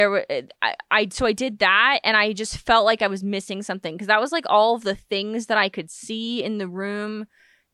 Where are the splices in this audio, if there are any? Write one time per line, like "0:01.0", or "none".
none